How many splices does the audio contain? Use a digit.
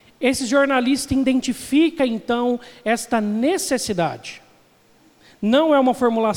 0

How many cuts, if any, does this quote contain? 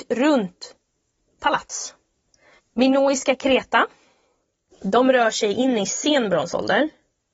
2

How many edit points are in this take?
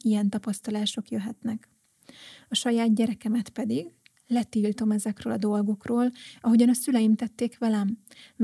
0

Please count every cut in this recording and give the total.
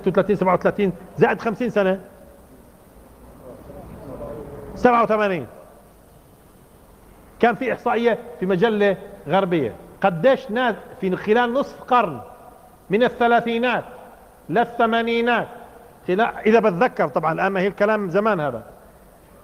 1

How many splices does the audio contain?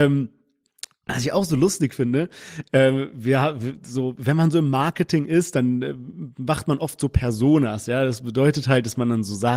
0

